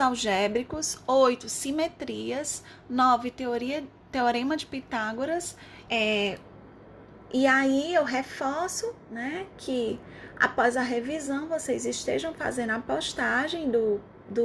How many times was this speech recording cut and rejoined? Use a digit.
1